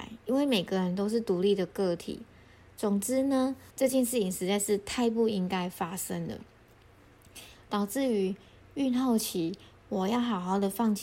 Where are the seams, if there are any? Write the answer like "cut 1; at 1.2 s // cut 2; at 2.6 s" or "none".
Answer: cut 1; at 3.7 s